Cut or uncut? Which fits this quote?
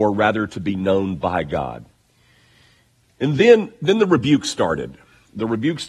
uncut